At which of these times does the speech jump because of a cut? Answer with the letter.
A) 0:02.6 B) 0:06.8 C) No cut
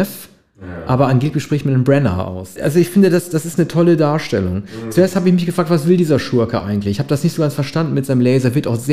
A